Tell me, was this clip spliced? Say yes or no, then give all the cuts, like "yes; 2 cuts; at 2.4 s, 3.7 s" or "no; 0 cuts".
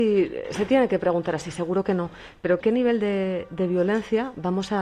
no; 0 cuts